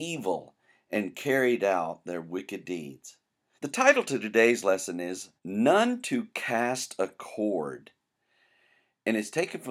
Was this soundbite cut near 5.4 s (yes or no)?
yes